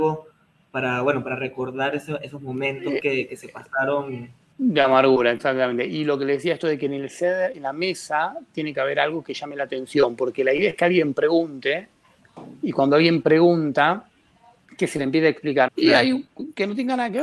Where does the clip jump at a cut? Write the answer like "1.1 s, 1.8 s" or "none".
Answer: 15.7 s

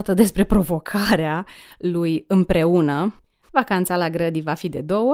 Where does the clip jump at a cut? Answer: 3.4 s

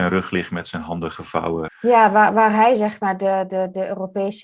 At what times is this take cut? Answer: 1.7 s

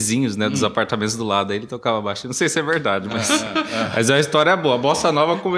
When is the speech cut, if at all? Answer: none

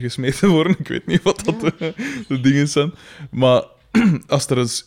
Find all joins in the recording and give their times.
none

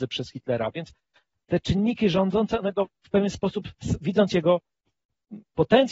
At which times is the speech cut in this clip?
none

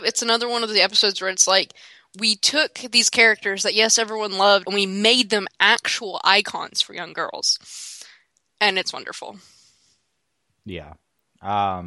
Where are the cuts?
4.6 s

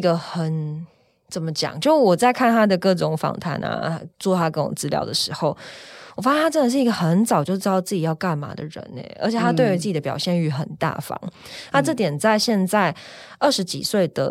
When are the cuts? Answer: none

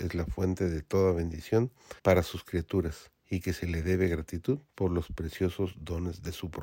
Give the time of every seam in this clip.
2.0 s, 3.2 s, 4.7 s

